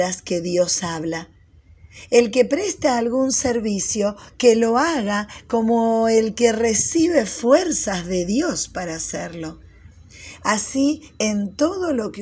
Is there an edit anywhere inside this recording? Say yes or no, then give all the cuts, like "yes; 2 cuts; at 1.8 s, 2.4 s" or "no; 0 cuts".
no; 0 cuts